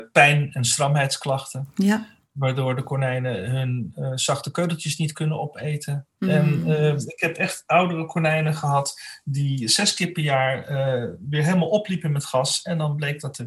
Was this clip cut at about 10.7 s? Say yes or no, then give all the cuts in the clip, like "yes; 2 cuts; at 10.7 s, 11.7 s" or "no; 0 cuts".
no; 1 cut; at 6.2 s